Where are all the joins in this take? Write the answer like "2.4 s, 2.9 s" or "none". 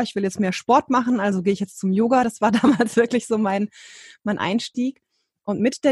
none